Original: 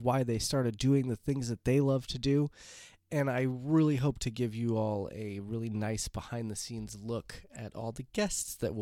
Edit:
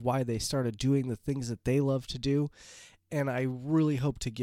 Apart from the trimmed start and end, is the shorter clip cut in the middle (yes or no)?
no